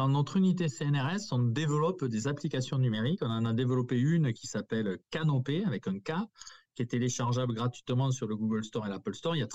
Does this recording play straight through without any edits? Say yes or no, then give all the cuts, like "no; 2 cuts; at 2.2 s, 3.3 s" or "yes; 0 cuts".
yes; 0 cuts